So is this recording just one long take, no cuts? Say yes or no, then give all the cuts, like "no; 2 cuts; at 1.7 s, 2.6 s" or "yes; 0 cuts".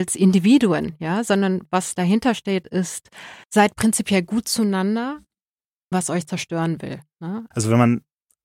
no; 3 cuts; at 3.4 s, 5.9 s, 7.5 s